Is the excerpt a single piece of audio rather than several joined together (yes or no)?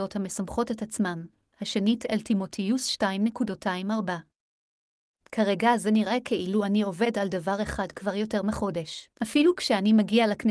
no